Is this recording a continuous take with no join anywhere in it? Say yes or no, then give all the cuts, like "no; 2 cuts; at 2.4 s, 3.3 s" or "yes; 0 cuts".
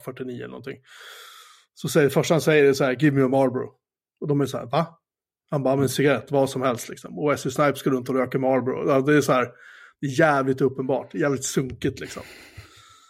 yes; 0 cuts